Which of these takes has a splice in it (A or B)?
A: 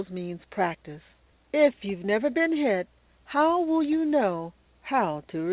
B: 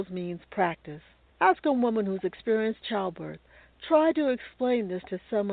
B